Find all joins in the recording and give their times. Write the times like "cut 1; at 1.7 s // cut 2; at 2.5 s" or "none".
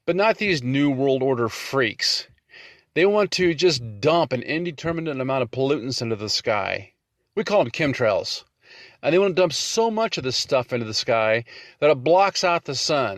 none